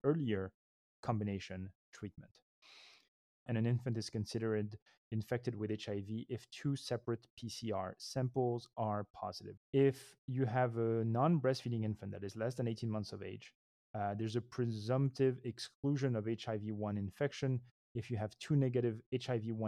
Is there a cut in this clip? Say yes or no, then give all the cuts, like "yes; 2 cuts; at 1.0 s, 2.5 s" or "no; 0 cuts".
yes; 2 cuts; at 3.5 s, 9.6 s